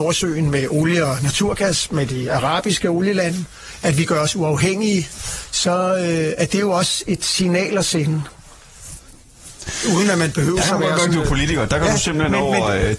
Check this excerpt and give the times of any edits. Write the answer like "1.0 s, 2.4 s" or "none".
none